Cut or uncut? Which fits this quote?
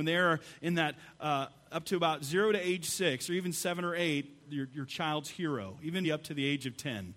cut